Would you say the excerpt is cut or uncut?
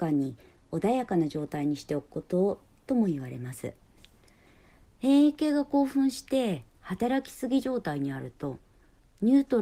uncut